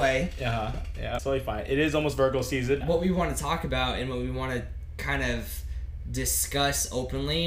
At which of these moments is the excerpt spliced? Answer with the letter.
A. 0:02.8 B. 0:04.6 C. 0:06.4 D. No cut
A